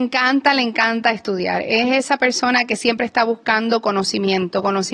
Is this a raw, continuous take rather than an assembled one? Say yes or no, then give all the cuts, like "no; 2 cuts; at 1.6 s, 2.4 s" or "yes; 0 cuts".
yes; 0 cuts